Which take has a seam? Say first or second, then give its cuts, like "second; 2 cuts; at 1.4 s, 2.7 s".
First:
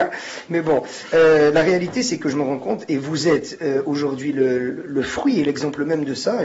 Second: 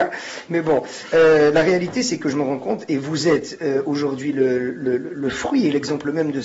first; 1 cut; at 4.7 s